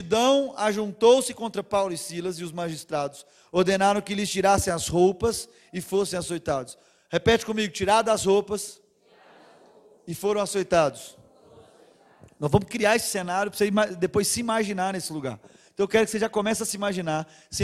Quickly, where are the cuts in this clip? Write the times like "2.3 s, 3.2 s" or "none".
none